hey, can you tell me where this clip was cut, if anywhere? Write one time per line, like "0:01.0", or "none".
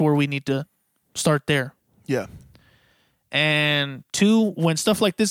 none

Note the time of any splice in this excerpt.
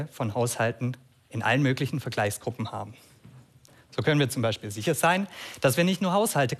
none

